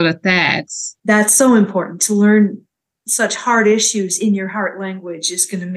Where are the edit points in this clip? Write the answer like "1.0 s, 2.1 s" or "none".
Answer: 1.0 s